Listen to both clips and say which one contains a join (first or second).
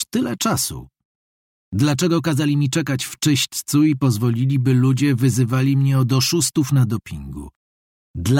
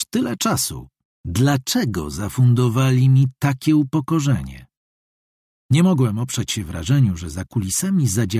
second